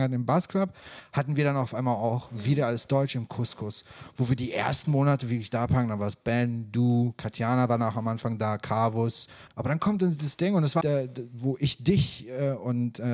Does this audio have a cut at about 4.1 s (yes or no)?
no